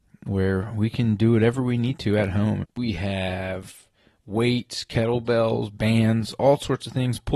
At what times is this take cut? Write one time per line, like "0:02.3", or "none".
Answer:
0:02.6